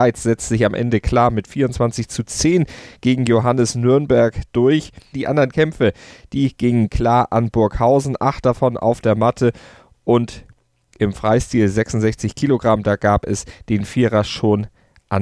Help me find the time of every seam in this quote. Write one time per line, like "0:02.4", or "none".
0:05.1